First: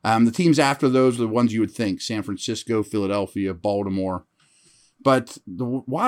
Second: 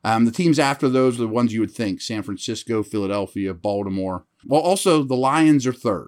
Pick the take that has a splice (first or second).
second